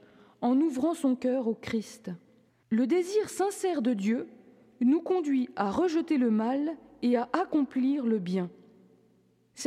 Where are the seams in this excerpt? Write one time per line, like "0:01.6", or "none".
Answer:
0:02.5